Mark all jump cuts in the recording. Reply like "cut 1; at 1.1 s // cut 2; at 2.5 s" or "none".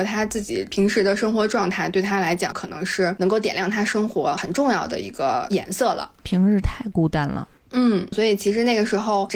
cut 1; at 2.5 s // cut 2; at 8.1 s